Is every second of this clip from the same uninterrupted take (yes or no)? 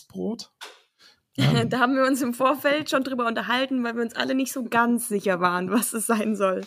yes